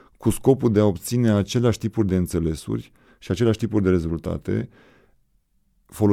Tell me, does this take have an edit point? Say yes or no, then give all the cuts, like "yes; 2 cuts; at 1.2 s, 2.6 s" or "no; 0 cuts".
no; 0 cuts